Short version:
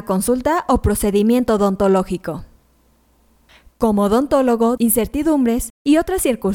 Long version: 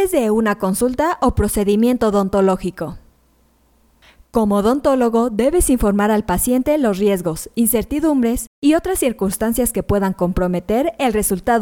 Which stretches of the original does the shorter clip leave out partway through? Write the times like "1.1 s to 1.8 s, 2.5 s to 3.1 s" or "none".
5.3 s to 7.5 s